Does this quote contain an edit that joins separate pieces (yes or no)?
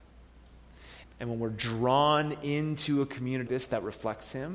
yes